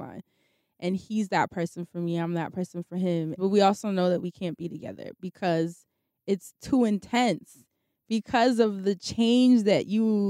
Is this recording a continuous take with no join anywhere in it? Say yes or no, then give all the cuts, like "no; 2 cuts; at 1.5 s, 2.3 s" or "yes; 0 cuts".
no; 1 cut; at 3.4 s